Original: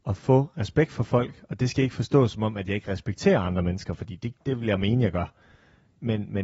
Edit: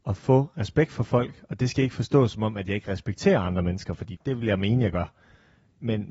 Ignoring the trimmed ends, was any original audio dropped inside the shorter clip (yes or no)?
yes